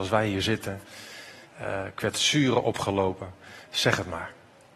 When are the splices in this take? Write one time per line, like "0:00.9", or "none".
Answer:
0:01.5